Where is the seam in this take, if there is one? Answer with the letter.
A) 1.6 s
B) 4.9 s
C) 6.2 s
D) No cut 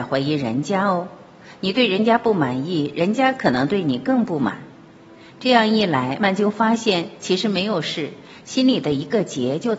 C